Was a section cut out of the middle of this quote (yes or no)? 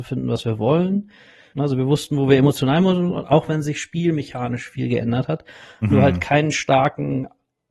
yes